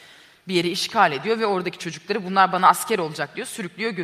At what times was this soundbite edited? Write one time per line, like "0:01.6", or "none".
none